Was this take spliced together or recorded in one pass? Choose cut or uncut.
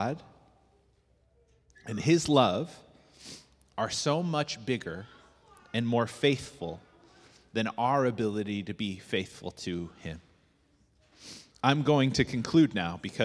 cut